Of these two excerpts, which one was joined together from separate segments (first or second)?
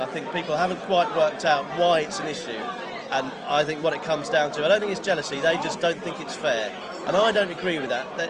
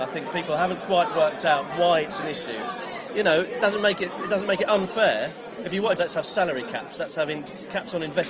second